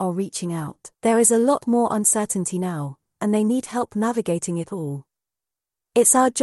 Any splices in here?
yes; 1 cut; at 0.9 s

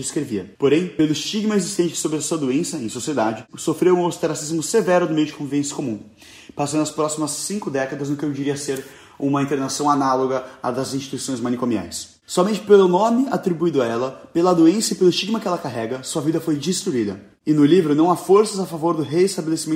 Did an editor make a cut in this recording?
no; 0 cuts

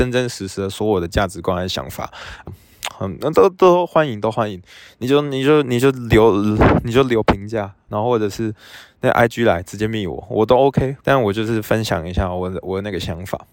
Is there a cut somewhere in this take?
yes; 3 cuts; at 2.5 s, 7.9 s, 11.0 s

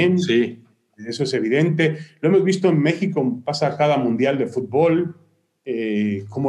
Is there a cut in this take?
no; 0 cuts

